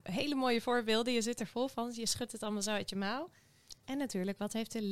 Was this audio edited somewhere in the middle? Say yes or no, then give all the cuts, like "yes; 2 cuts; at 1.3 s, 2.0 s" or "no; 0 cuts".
yes; 1 cut; at 3.8 s